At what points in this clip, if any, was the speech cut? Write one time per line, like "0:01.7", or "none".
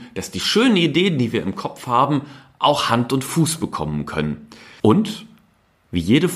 0:04.8

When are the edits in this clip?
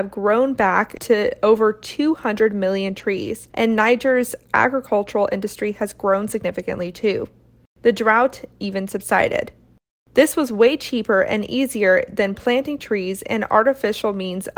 none

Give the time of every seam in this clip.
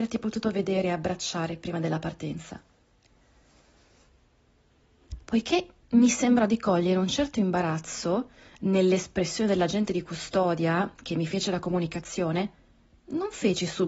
0:05.2

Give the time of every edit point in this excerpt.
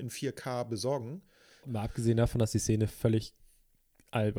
0:01.6

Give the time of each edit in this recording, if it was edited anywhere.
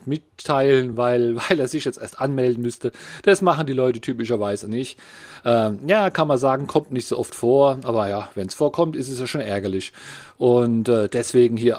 none

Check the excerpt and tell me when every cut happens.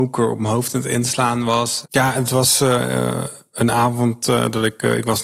0:01.8

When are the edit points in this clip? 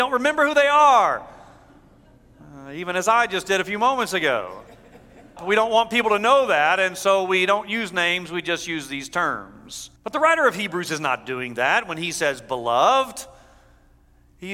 0:05.4
0:10.0

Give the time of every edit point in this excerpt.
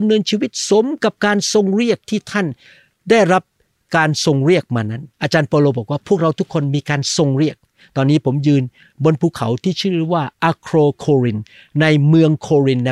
0:05.1

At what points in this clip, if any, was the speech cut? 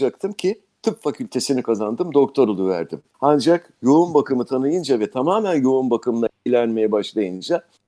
0:03.1

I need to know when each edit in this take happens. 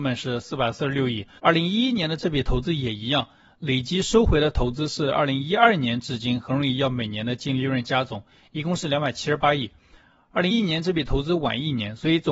0:01.4
0:10.5

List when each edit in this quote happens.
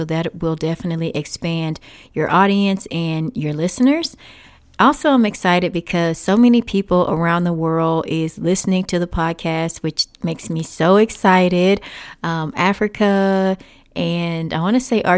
none

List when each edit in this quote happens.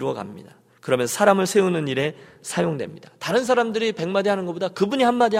none

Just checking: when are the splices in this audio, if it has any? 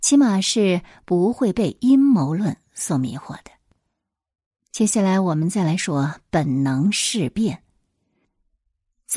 0:05.8

